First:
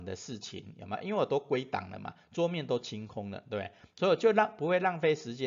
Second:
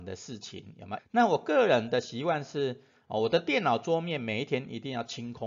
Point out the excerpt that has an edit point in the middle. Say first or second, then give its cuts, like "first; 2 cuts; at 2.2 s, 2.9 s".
second; 1 cut; at 1.0 s